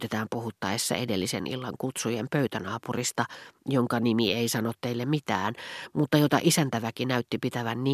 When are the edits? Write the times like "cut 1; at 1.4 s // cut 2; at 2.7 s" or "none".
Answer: none